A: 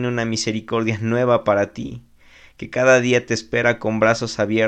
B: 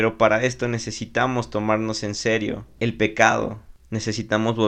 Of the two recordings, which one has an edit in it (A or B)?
B